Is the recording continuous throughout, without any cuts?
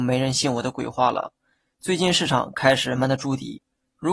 no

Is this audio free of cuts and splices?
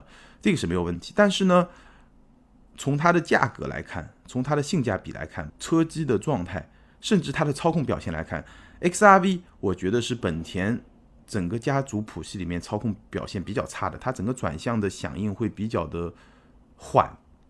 no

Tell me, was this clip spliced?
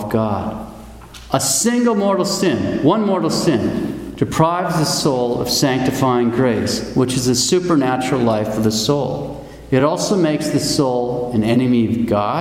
no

